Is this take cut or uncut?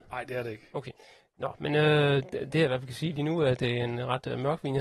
uncut